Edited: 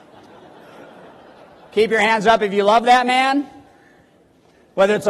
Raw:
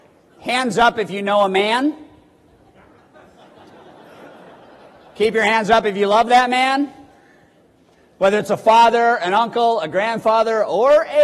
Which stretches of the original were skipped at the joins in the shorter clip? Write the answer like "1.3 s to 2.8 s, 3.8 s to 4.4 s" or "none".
none